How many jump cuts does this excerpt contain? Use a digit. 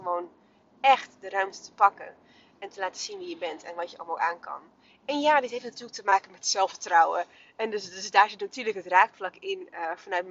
0